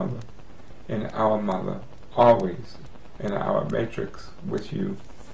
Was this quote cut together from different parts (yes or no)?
no